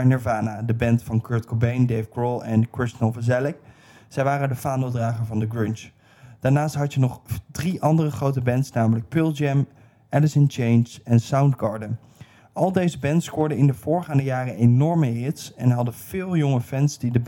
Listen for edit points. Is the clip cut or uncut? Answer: uncut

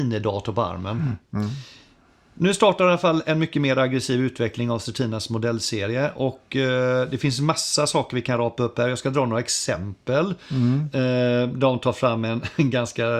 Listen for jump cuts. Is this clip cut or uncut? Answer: uncut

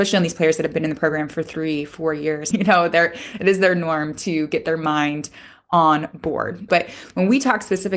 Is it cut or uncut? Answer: cut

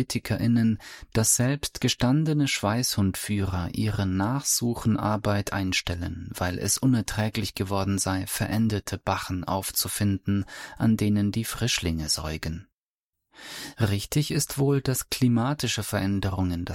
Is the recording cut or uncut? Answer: uncut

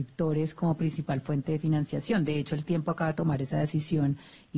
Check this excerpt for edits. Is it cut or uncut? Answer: uncut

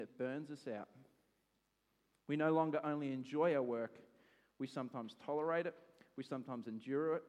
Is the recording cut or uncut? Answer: uncut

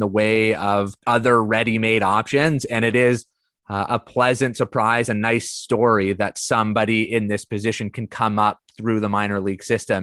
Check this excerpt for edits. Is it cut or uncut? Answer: cut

